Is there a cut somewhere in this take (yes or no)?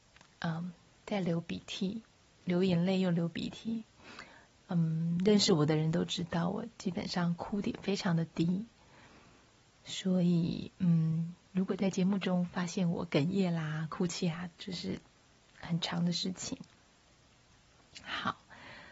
no